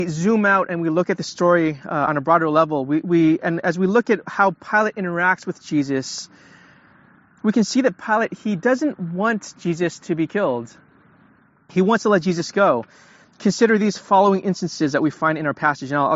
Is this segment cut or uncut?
uncut